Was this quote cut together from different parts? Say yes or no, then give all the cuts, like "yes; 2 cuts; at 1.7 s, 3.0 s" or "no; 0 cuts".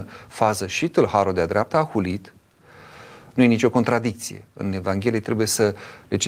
yes; 1 cut; at 3.3 s